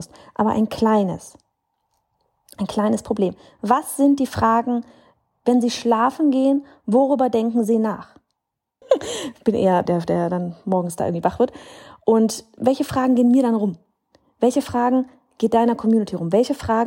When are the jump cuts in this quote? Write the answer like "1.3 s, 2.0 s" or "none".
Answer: 8.8 s, 9.9 s, 12.6 s

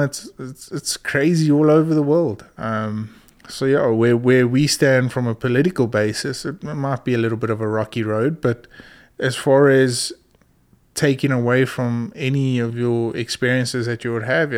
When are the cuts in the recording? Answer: 2.6 s

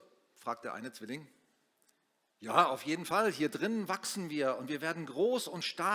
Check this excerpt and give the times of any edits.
none

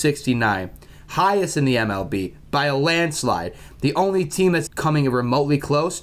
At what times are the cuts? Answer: 4.7 s

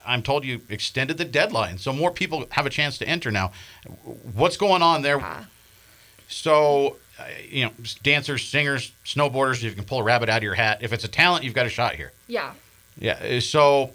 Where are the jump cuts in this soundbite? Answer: 5.2 s, 12.2 s

